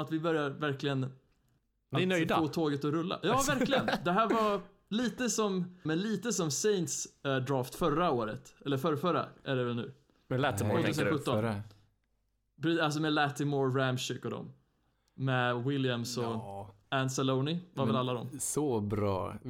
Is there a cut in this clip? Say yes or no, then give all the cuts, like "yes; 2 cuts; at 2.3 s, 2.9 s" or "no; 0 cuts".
yes; 1 cut; at 5.9 s